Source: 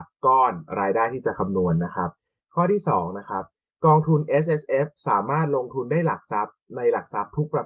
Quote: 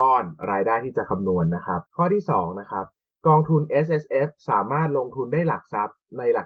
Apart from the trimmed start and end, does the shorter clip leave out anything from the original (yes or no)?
yes